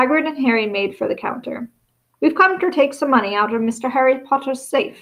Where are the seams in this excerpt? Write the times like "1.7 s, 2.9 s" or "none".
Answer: 2.1 s